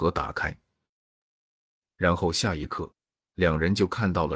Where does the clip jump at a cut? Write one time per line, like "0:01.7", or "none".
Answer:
none